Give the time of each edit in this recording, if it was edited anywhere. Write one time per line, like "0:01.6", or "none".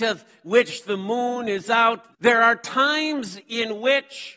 0:02.1